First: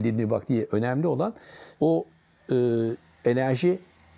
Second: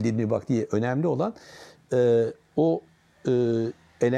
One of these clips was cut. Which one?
first; 1 cut; at 1.7 s

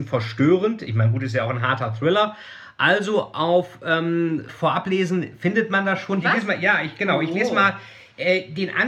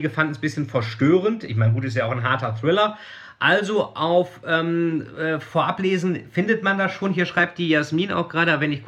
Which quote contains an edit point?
first; 2 cuts; at 4.5 s, 6.2 s

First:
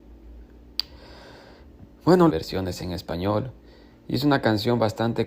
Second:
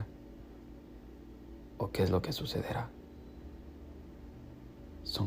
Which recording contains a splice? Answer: first; 1 cut; at 2.3 s

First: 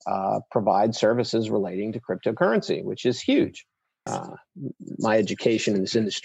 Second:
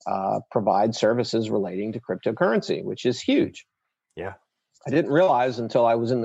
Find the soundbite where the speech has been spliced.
first; 1 cut; at 4.1 s

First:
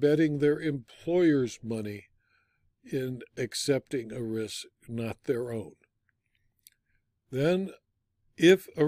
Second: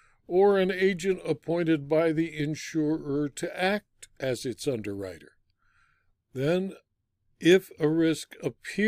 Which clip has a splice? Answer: second; 1 cut; at 6.1 s

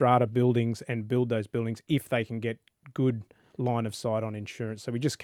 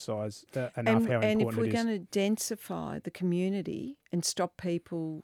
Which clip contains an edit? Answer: second; 1 cut; at 4.0 s

